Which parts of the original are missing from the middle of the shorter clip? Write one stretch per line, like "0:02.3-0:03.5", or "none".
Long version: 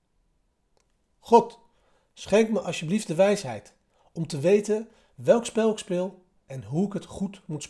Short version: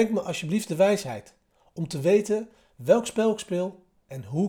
none